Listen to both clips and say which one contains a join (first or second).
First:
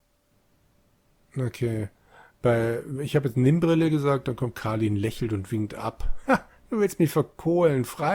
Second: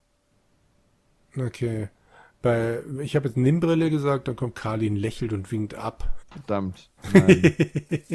second